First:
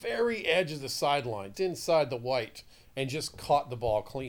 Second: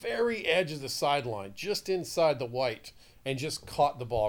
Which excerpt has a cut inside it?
first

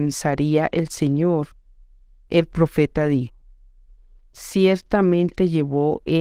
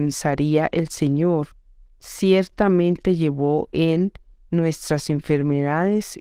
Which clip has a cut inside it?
second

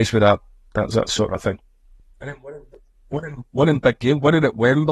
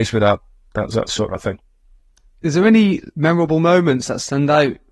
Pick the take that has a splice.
first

